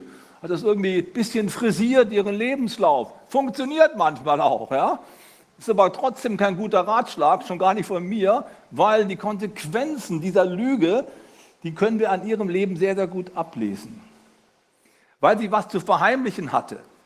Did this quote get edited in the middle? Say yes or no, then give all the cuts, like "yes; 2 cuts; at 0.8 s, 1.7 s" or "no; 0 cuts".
no; 0 cuts